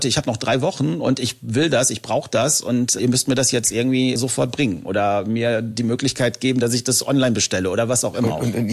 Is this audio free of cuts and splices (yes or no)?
no